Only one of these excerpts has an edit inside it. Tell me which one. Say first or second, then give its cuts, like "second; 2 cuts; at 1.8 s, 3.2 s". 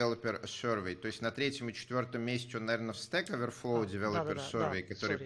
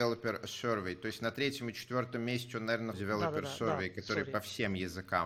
second; 1 cut; at 2.9 s